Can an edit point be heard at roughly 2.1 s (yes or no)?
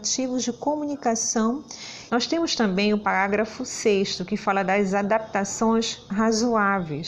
yes